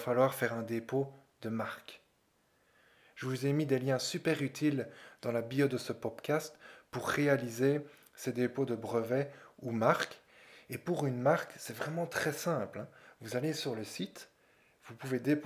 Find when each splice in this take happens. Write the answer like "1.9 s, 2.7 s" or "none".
none